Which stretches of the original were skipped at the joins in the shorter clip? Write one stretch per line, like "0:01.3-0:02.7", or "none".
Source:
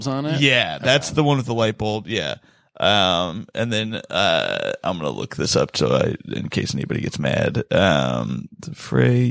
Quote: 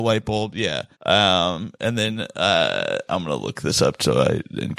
0:02.5-0:02.7